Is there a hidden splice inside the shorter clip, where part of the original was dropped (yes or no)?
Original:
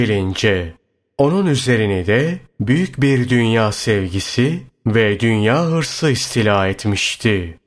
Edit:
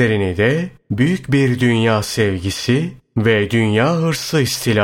no